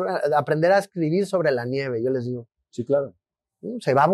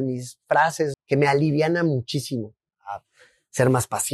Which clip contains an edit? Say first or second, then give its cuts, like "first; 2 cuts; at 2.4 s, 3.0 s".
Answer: second; 2 cuts; at 0.9 s, 2.7 s